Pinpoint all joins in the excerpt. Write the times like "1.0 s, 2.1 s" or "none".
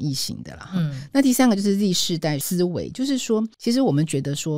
none